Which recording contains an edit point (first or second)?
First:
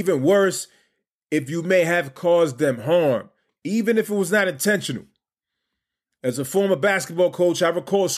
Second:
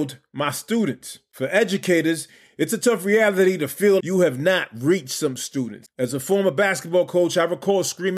second